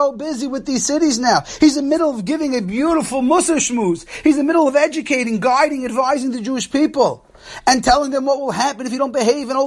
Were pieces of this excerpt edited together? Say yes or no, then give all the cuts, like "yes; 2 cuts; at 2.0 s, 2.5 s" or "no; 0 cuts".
no; 0 cuts